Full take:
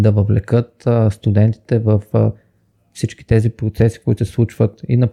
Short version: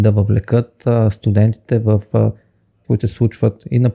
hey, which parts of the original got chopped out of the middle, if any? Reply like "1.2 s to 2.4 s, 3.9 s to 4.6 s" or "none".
2.8 s to 4.0 s